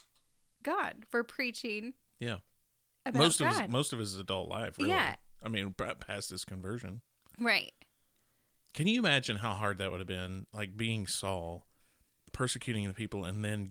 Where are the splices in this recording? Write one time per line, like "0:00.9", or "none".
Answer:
none